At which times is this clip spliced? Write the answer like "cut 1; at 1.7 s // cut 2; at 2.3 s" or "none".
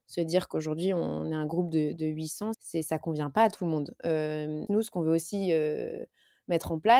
cut 1; at 2.5 s // cut 2; at 4.7 s